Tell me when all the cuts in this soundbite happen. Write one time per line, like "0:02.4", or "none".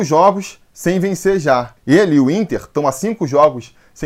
0:01.8